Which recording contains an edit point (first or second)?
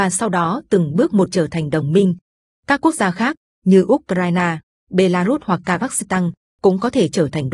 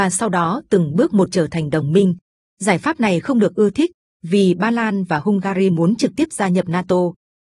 second